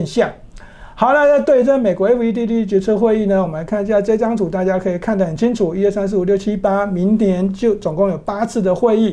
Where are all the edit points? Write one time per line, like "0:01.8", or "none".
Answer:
none